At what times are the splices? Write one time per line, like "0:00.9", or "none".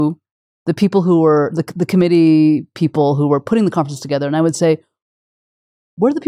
none